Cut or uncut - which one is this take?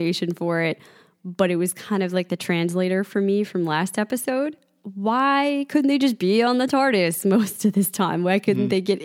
uncut